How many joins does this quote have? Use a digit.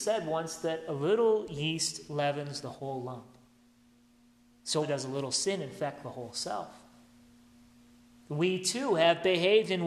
1